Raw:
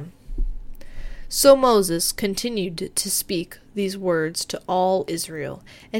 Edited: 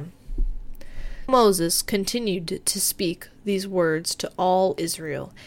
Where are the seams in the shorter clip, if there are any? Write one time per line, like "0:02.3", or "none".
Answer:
0:01.3